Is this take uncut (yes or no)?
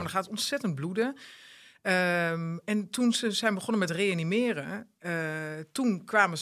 yes